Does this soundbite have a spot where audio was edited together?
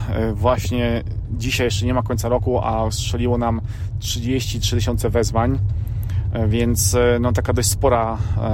no; 0 cuts

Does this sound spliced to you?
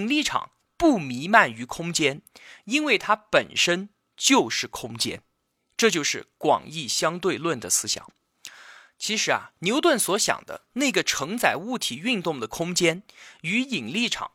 no; 0 cuts

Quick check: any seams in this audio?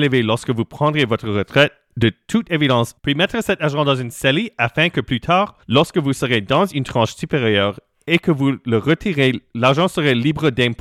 yes; 2 cuts; at 3.0 s, 5.6 s

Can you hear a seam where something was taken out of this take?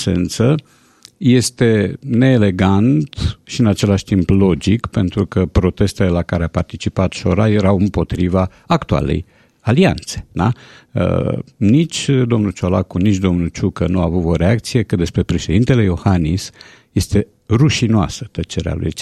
no; 0 cuts

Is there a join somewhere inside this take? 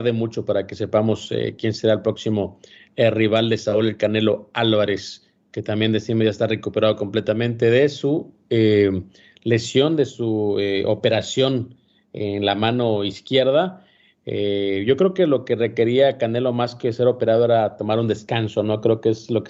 no; 0 cuts

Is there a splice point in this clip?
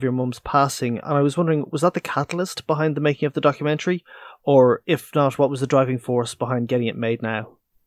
no; 0 cuts

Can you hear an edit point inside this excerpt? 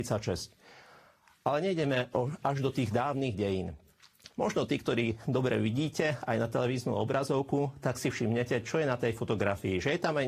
yes; 1 cut; at 4.3 s

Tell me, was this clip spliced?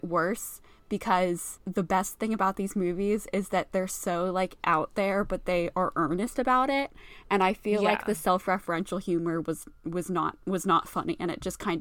no; 0 cuts

